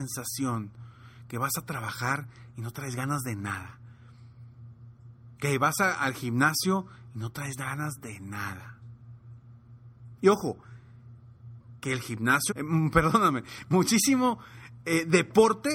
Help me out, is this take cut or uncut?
cut